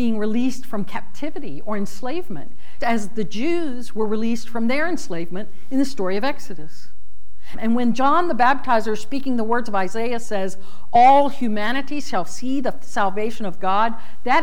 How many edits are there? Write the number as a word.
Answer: two